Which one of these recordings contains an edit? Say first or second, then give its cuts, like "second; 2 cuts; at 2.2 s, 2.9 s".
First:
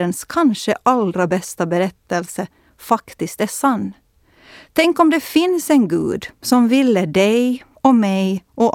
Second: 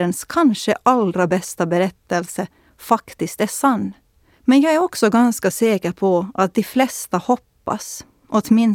second; 1 cut; at 4.4 s